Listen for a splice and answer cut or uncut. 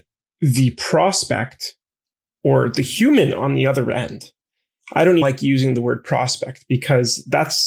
cut